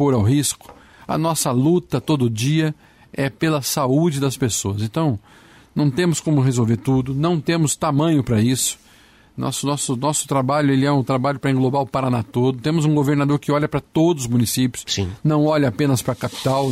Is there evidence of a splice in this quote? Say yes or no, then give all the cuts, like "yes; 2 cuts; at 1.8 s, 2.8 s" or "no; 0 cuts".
no; 0 cuts